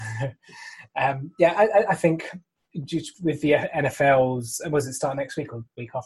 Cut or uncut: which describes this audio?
cut